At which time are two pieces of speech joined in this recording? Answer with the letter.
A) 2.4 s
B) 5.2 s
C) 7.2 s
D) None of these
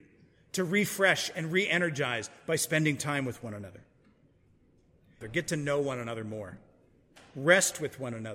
B